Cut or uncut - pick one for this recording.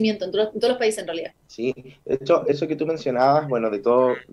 cut